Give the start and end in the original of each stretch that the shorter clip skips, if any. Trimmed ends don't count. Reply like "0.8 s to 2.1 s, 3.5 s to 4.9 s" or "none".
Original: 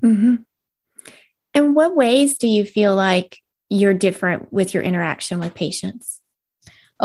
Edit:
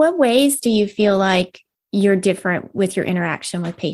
none